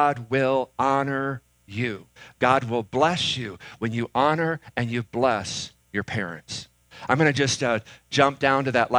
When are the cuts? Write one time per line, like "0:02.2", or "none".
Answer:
0:05.8